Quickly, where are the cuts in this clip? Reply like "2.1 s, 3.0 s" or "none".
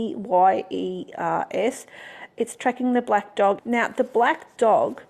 3.6 s